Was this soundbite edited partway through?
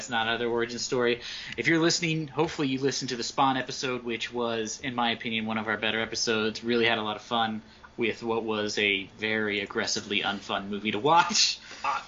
yes; 1 cut; at 9.1 s

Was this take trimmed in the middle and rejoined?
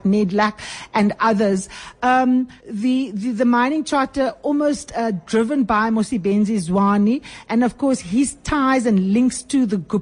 yes; 1 cut; at 2.6 s

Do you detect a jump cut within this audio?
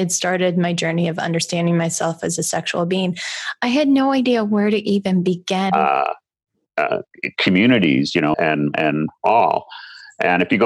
yes; 2 cuts; at 5.7 s, 8.3 s

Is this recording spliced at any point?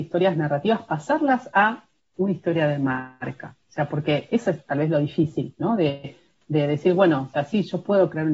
no; 0 cuts

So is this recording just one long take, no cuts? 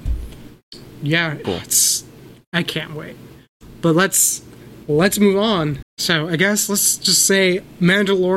no; 2 cuts; at 1.4 s, 5.8 s

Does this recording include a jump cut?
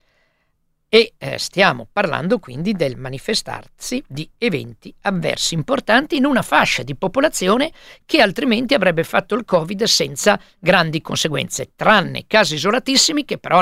no; 0 cuts

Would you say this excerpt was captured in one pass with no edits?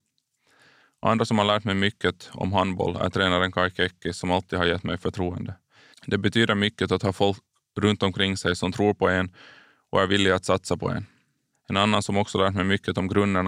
no; 2 cuts; at 5.9 s, 11.5 s

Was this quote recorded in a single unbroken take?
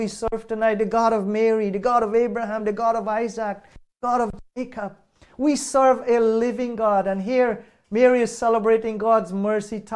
yes; 0 cuts

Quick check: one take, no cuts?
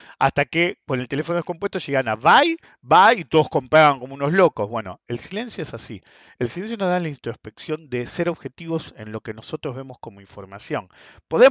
yes; 0 cuts

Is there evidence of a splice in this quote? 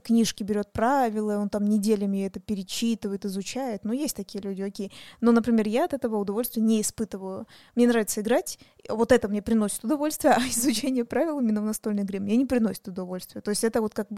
no; 0 cuts

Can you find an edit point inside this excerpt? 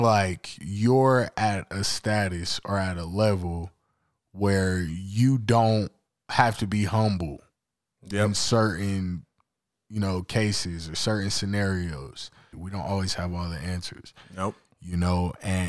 yes; 1 cut; at 12.5 s

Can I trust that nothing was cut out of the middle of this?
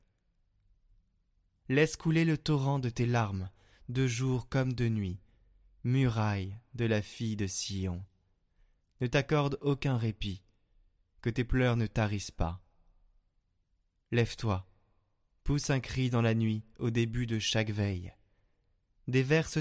yes; 0 cuts

